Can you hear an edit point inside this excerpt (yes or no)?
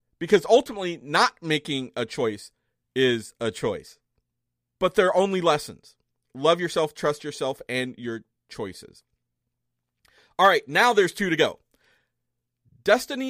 no